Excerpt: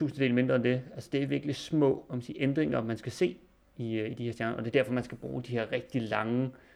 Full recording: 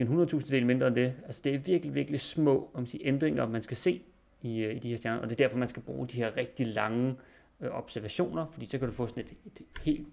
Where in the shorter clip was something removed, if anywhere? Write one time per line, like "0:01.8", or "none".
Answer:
0:01.3